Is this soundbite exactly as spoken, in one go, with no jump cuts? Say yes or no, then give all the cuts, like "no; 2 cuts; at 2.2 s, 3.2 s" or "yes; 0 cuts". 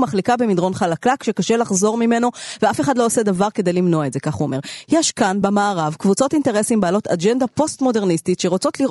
yes; 0 cuts